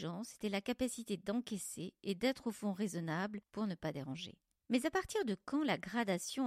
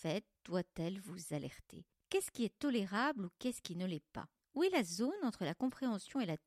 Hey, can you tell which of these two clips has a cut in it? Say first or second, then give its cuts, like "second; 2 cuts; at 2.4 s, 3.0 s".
first; 1 cut; at 3.5 s